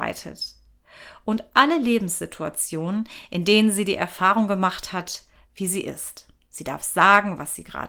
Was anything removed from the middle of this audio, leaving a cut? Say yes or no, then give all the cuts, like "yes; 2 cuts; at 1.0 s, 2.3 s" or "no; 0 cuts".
yes; 1 cut; at 5.5 s